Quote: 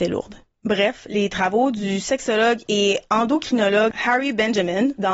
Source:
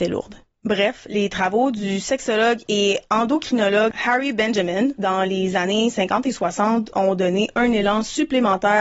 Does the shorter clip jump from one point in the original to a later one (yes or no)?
no